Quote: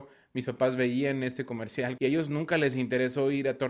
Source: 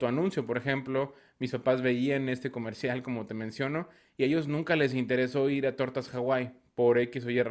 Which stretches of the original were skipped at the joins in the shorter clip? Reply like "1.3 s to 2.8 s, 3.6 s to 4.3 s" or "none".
3.0 s to 4.2 s